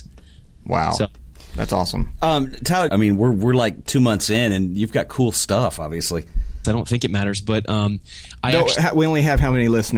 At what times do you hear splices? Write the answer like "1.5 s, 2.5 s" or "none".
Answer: 2.9 s, 6.6 s